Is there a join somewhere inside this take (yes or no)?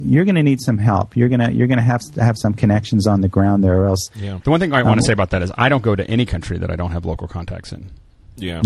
yes